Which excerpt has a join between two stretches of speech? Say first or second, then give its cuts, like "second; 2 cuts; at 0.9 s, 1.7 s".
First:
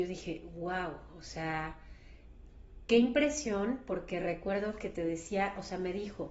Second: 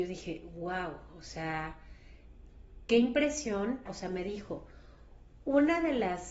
second; 1 cut; at 3.9 s